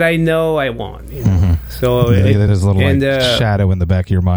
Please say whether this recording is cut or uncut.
uncut